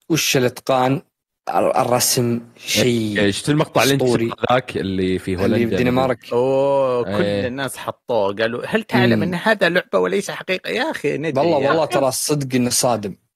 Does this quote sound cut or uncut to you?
uncut